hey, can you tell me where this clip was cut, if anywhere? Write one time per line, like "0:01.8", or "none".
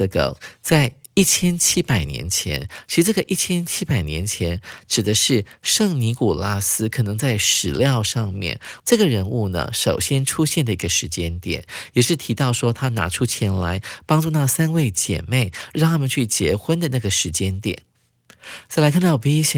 0:08.8